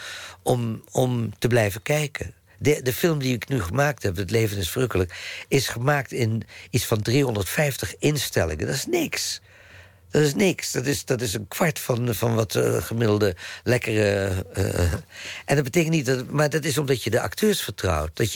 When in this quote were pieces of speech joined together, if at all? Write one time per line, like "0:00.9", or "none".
0:11.0
0:12.2